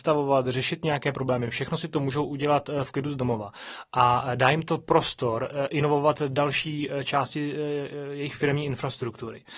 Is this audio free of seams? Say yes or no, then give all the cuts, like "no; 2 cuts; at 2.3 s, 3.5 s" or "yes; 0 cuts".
yes; 0 cuts